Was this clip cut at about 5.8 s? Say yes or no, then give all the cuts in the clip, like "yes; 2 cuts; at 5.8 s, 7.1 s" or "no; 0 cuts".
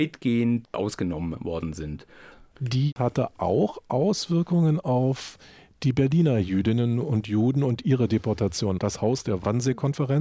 no; 2 cuts; at 2.5 s, 8.8 s